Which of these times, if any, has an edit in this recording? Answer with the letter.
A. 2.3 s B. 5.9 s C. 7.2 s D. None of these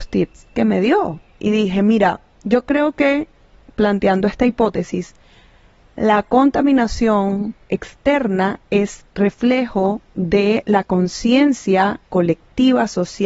D